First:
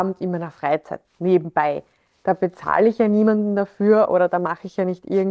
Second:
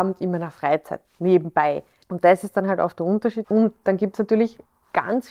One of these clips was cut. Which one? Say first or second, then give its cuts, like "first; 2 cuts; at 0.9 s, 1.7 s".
second; 2 cuts; at 2.0 s, 3.4 s